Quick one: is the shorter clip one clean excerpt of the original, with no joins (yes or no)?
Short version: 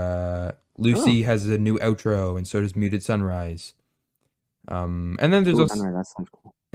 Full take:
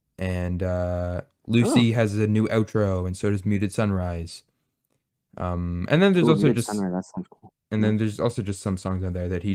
no